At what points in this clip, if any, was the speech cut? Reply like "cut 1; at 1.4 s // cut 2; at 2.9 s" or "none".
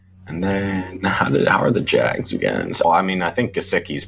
cut 1; at 2.8 s